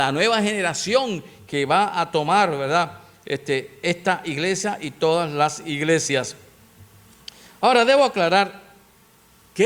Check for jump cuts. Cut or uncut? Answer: uncut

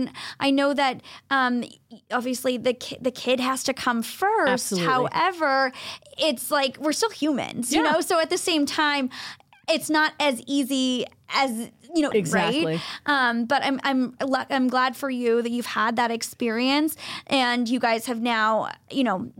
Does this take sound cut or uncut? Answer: cut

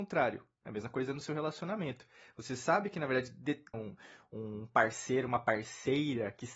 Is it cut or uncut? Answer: cut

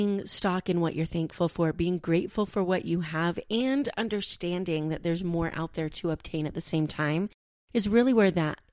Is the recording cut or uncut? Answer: uncut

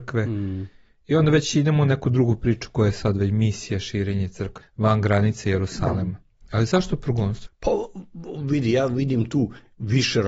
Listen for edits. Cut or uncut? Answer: cut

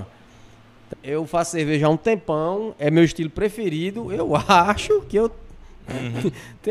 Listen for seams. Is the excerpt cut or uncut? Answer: cut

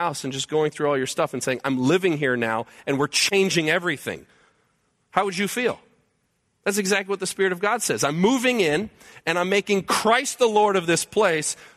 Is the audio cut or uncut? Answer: uncut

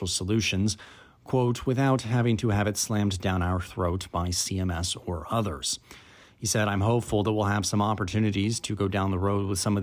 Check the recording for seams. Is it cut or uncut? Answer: uncut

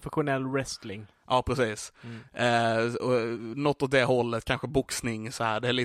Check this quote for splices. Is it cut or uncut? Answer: uncut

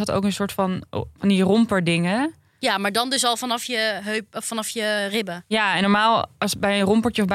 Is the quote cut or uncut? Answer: uncut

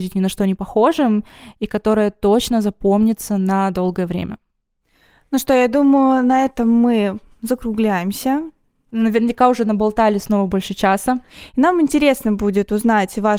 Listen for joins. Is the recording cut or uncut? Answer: uncut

